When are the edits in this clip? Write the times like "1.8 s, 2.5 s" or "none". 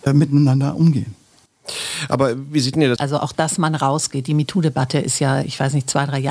3.0 s